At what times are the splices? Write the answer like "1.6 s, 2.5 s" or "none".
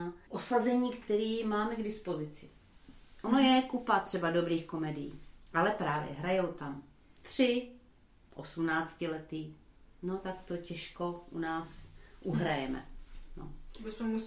none